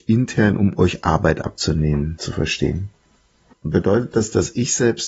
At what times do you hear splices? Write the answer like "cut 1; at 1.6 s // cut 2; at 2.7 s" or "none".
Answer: cut 1; at 3.5 s